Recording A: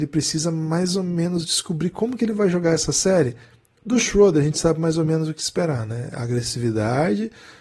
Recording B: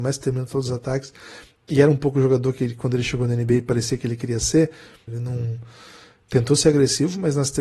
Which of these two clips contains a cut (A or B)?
B